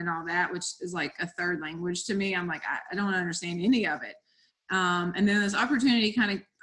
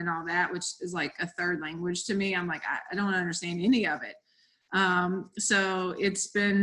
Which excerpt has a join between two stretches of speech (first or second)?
first